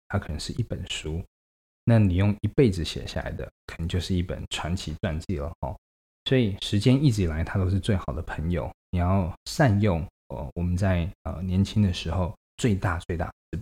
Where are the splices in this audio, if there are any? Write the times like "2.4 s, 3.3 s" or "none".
none